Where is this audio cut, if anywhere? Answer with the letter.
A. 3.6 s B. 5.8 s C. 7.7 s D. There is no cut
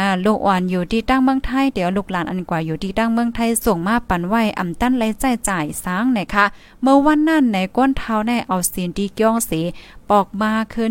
A